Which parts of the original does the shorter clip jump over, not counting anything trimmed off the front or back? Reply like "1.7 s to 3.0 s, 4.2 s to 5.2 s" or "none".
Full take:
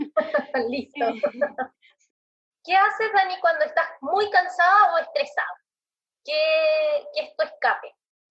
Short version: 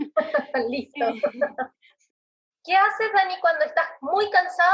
none